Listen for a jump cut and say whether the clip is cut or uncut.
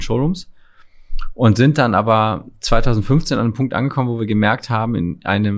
uncut